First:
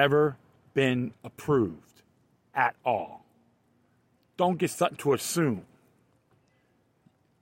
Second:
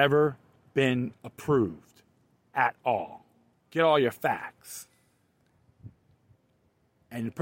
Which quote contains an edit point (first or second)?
second